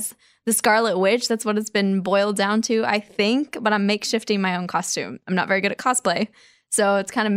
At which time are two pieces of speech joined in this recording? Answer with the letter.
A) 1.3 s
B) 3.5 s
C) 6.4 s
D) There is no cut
D